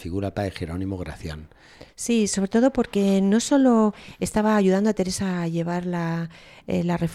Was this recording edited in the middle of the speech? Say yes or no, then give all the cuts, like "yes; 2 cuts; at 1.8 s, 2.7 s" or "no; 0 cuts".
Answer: yes; 1 cut; at 1.9 s